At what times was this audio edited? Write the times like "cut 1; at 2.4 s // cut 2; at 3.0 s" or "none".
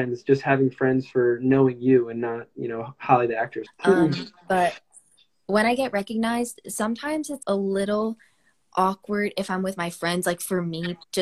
cut 1; at 3.7 s // cut 2; at 7.4 s